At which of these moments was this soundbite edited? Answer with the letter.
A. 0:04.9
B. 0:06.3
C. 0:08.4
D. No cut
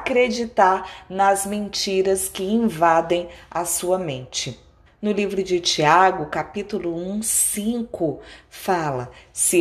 A